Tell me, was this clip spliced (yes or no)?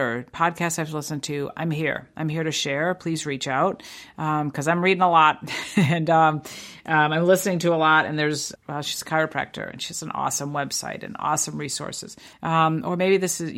yes